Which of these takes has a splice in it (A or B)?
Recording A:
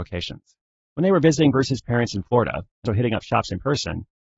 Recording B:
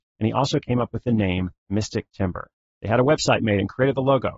A